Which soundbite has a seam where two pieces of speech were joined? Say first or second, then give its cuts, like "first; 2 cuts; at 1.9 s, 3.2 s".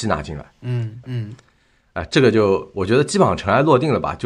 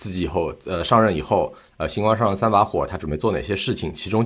first; 1 cut; at 1.0 s